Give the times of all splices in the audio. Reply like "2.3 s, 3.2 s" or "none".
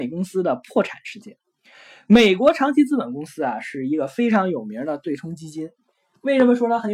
none

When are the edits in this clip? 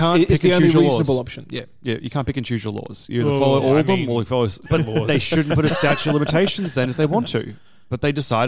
4.7 s

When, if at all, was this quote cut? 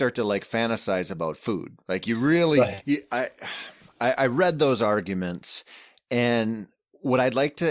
2.8 s

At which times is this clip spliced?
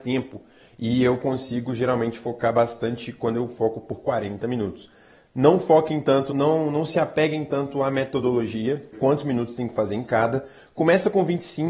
6.3 s, 8.9 s

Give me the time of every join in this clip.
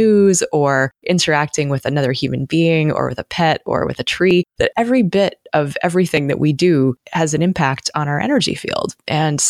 none

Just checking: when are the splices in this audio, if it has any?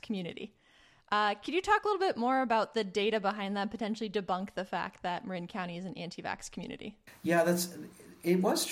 none

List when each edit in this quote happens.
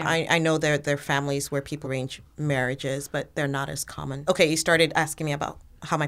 1.8 s, 4.3 s

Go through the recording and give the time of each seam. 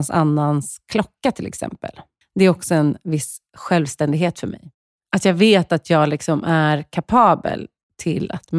2.2 s

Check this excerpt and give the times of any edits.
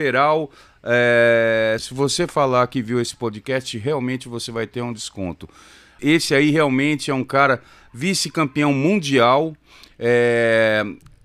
1.8 s, 6.0 s

